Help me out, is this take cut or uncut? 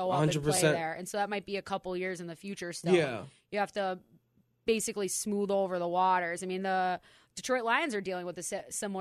uncut